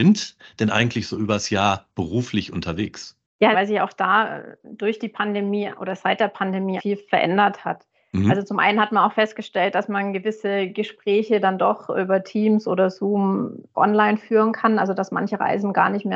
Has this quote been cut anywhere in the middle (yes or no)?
yes